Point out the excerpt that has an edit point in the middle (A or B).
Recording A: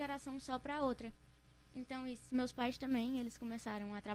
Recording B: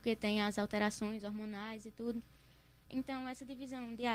B